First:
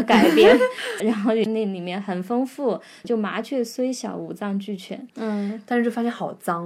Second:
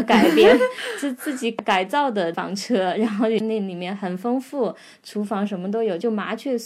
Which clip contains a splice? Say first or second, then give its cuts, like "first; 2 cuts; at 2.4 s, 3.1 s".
first; 3 cuts; at 1.0 s, 3.0 s, 5.1 s